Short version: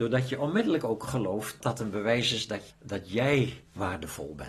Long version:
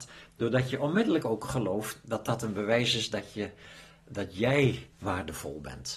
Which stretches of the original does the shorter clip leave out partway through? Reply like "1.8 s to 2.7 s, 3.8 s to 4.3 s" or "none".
2.0 s to 2.2 s, 3.3 s to 4.0 s